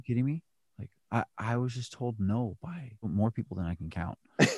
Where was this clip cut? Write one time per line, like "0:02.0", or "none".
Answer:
0:03.0